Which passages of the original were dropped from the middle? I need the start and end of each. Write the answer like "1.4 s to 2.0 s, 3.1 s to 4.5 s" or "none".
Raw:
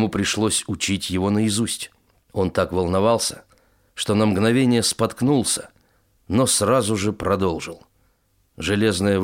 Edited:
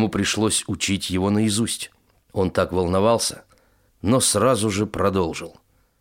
3.9 s to 6.1 s

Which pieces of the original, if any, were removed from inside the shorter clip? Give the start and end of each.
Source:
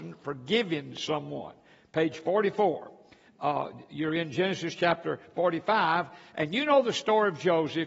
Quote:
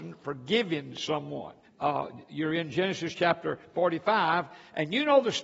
1.6 s to 3.2 s

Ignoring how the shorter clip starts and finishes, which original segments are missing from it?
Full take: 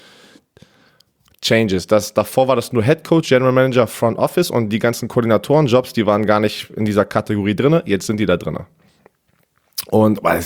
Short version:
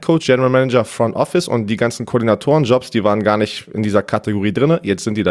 none

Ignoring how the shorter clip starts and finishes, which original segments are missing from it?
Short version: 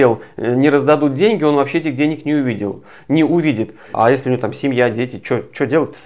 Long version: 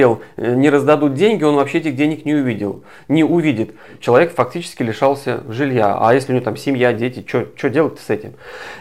3.9 s to 6.0 s

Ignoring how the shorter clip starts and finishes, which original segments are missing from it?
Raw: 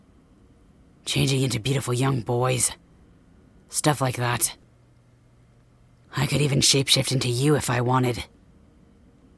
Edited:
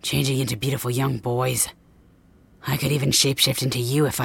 3.6 s to 6.1 s

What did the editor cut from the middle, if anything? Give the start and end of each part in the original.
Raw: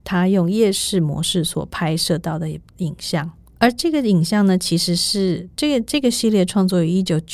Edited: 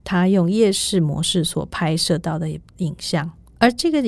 none

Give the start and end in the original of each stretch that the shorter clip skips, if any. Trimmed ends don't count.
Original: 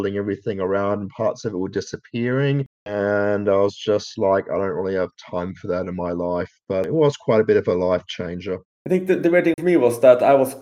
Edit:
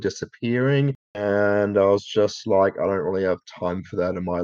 none

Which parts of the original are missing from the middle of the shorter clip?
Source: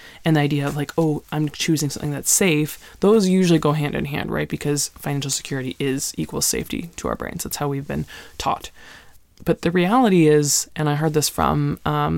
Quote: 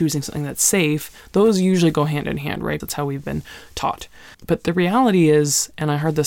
4.5 s to 7.4 s, 9.0 s to 9.3 s

